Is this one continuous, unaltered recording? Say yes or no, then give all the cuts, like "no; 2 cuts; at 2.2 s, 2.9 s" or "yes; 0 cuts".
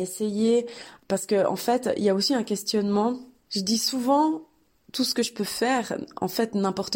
yes; 0 cuts